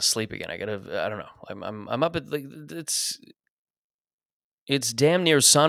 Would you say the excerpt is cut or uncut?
uncut